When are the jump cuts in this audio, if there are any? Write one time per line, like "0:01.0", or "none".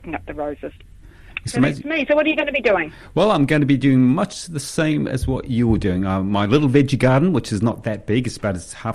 none